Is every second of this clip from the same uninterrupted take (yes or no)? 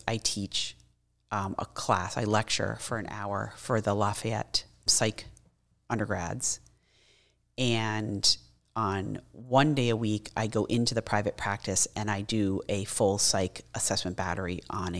no